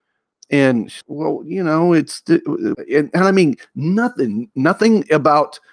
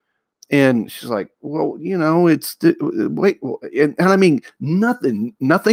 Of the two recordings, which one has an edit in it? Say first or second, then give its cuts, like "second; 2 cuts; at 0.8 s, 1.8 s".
first; 2 cuts; at 1.0 s, 2.7 s